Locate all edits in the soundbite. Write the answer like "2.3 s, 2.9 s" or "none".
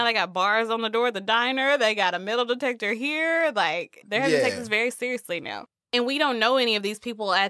4.0 s